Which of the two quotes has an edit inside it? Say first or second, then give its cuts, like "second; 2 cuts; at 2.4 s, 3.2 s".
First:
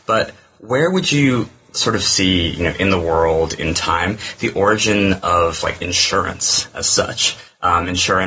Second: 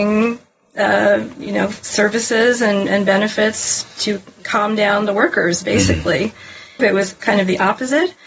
second; 1 cut; at 6.8 s